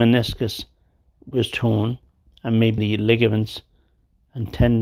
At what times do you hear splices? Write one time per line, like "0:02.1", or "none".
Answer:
0:02.8